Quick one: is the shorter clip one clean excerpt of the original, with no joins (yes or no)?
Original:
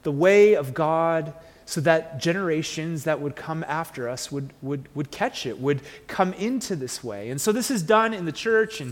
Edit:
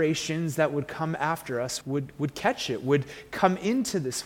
no